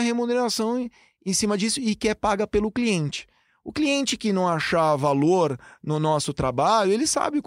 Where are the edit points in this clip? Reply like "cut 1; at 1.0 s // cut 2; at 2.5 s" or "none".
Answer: none

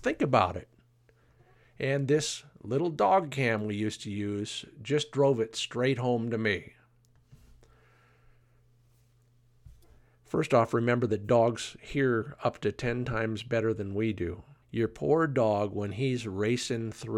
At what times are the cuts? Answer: cut 1; at 14.6 s

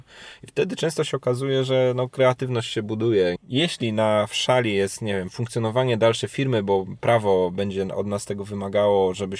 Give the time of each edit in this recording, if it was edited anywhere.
cut 1; at 3.4 s

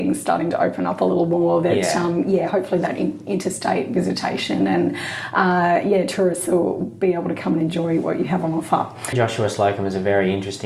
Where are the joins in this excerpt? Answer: cut 1; at 6.8 s // cut 2; at 9.1 s

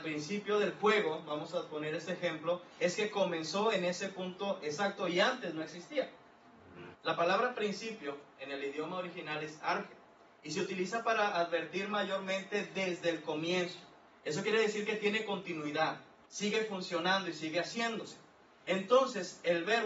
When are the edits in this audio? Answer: cut 1; at 6.9 s // cut 2; at 14.1 s // cut 3; at 16.3 s

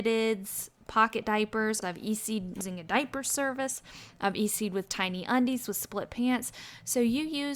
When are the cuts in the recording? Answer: cut 1; at 1.8 s

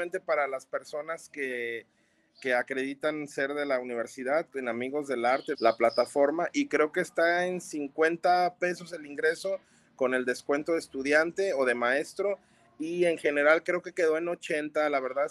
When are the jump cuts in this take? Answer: cut 1; at 5.5 s

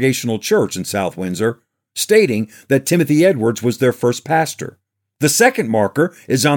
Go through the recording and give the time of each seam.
none

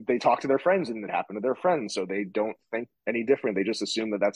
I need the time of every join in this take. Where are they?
cut 1; at 3.0 s

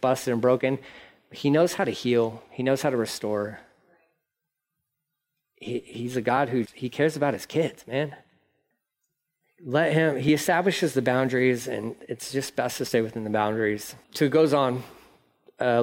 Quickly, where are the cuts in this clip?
cut 1; at 6.7 s // cut 2; at 14.0 s

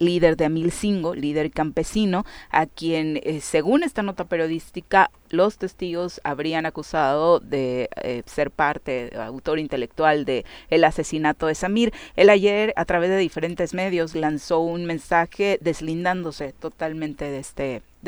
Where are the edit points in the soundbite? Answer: cut 1; at 12.8 s // cut 2; at 14.1 s

